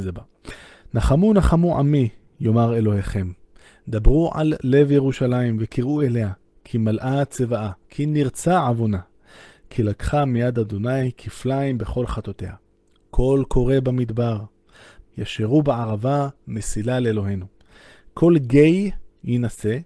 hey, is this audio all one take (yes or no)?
no